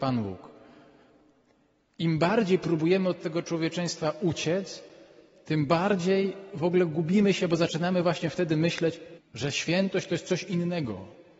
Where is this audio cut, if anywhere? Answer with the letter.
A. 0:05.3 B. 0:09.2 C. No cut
B